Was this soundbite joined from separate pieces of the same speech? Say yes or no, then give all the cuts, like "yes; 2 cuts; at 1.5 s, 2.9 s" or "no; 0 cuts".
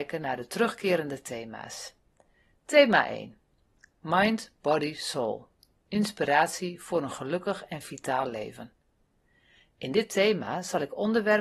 no; 0 cuts